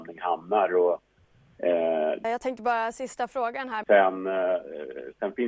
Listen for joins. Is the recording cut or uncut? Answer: cut